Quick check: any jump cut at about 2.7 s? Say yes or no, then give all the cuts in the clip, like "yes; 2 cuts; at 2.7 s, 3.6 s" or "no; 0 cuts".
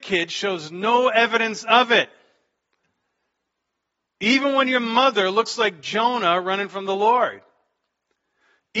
no; 0 cuts